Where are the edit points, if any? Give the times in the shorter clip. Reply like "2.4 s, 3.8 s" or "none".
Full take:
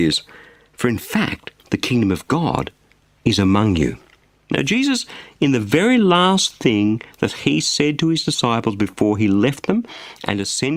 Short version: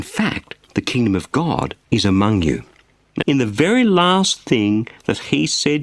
1.8 s, 3.2 s